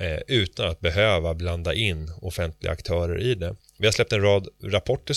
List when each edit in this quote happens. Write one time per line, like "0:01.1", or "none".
none